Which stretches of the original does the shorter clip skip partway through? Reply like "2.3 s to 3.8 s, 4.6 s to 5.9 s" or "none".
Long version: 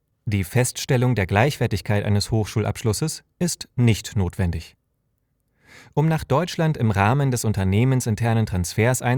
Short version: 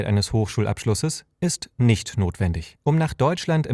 4.8 s to 5.9 s